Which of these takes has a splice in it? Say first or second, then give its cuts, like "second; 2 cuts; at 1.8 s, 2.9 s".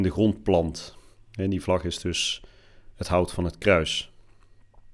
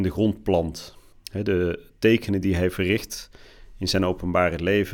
second; 1 cut; at 1.1 s